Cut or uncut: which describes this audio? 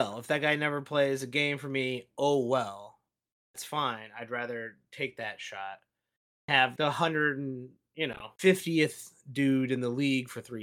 cut